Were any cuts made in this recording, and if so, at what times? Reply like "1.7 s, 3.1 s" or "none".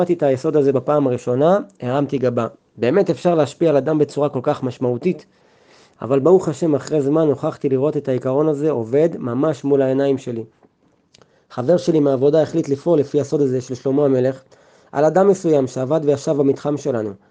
none